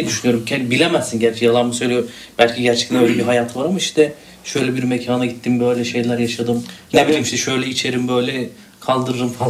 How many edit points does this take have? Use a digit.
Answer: 0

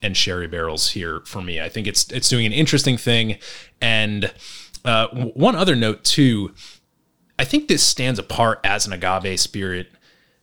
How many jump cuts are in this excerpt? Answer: 0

